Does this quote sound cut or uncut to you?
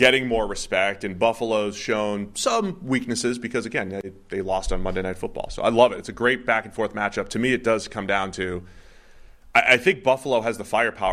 uncut